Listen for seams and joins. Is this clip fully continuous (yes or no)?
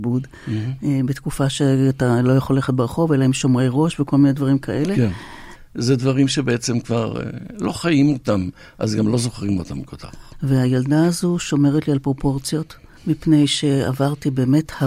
no